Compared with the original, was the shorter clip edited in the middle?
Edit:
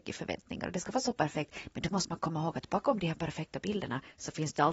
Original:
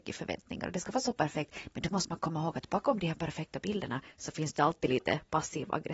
no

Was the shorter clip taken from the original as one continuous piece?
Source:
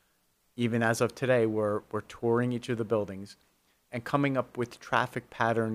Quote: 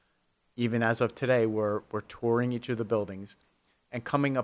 yes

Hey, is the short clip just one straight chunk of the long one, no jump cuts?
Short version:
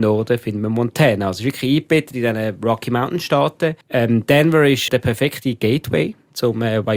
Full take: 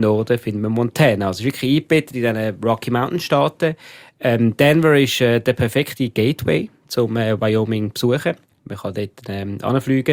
no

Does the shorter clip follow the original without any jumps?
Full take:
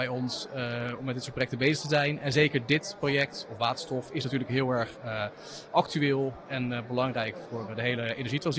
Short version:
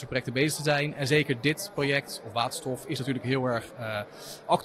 yes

